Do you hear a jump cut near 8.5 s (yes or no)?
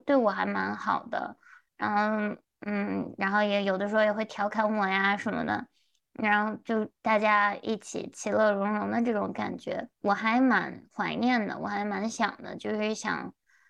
no